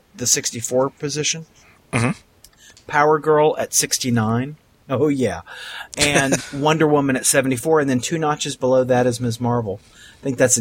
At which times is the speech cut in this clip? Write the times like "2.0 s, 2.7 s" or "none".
6.4 s

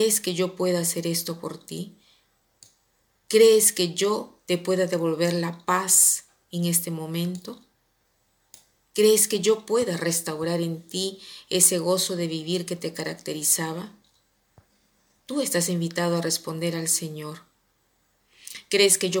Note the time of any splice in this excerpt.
none

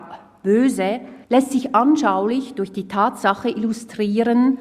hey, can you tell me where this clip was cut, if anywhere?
1.2 s

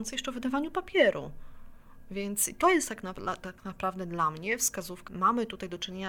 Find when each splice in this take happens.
5.1 s

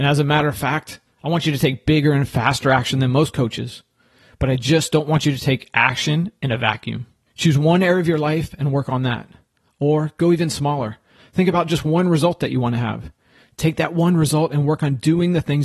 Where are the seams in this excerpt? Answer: 7.3 s

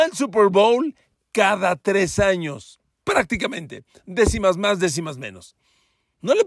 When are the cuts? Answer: none

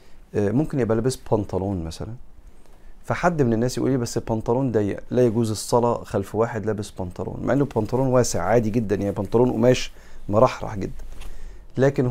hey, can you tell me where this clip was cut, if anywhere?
none

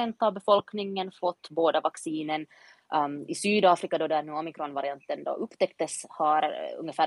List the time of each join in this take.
none

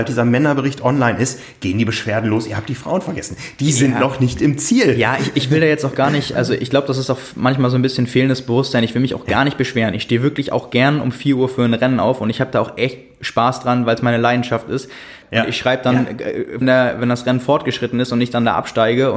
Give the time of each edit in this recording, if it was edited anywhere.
15.2 s, 16.6 s

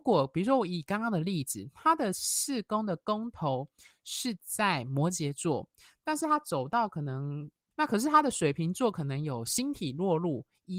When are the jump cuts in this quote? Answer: 7.7 s

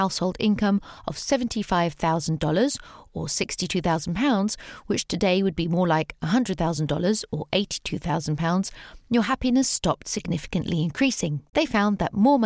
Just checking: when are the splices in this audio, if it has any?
none

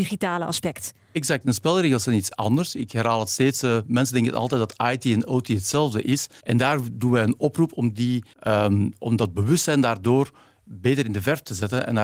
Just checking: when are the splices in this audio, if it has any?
6.4 s, 8.3 s

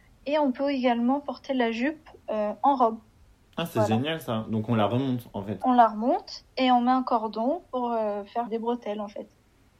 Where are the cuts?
5.6 s, 8.5 s

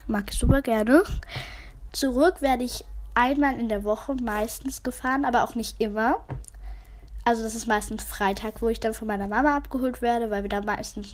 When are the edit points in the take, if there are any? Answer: 1.9 s

